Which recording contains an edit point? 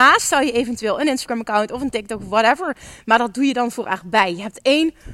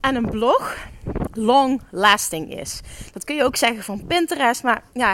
second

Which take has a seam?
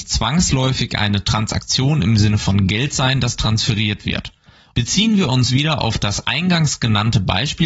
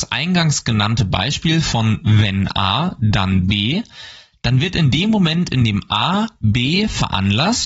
first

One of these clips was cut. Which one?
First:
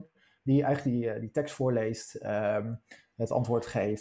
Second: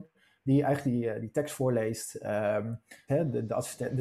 second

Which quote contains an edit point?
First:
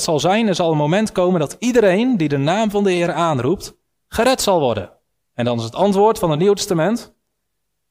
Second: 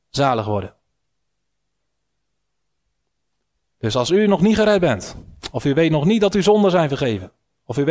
first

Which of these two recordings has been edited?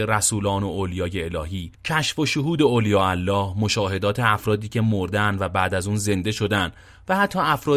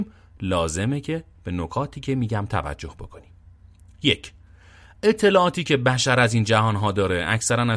first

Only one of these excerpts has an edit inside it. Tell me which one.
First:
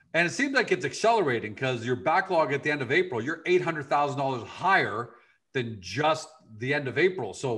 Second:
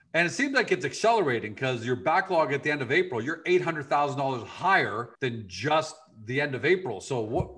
second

